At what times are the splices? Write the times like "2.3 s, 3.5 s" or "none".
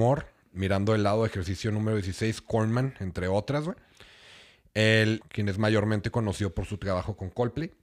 5.2 s